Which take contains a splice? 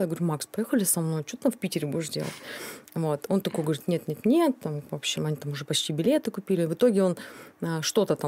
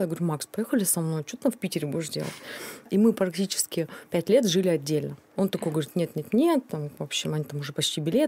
second; 2 cuts; at 2.9 s, 5.4 s

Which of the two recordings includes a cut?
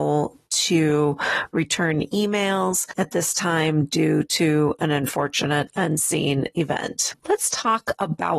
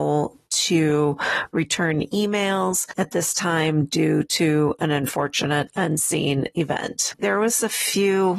second; 1 cut; at 7.2 s

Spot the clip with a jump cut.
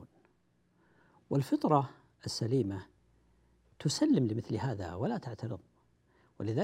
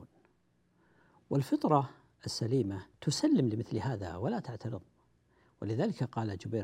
second; 1 cut; at 2.9 s

